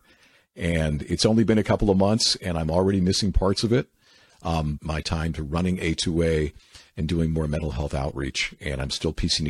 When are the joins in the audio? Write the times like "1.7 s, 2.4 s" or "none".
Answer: 4.8 s